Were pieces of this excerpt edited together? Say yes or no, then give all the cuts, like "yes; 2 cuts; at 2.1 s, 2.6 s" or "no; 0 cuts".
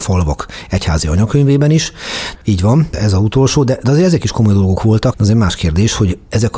yes; 2 cuts; at 2.4 s, 5.1 s